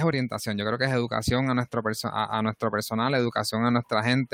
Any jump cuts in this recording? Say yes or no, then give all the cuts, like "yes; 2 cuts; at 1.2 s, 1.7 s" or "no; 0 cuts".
no; 0 cuts